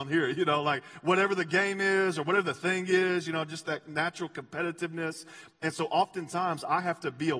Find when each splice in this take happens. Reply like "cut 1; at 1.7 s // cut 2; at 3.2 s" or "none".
none